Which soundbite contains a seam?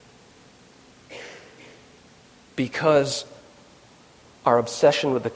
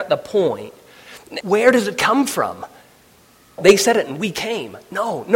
second; 2 cuts; at 1.4 s, 3.6 s

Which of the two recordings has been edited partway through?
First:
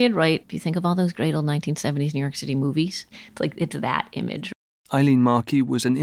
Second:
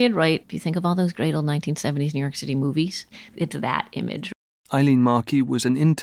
second; 1 cut; at 3.3 s

